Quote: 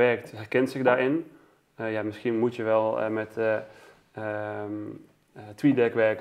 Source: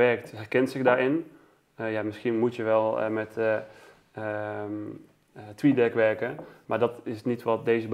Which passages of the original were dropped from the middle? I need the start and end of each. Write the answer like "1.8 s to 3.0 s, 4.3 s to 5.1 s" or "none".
none